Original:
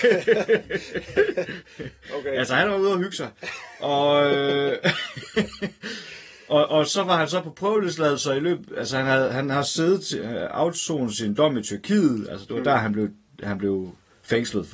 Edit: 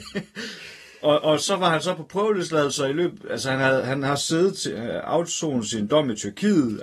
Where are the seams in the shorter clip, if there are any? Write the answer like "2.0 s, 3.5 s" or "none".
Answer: none